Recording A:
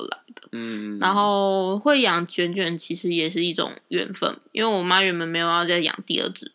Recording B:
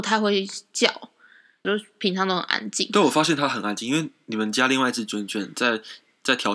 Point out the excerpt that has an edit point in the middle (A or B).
B